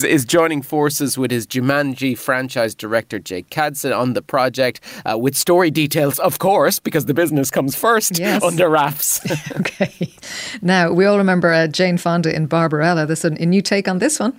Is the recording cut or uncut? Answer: uncut